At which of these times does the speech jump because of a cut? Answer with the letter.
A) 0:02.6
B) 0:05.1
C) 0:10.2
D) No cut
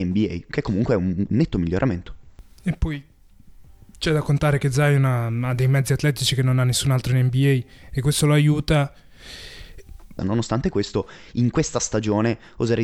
C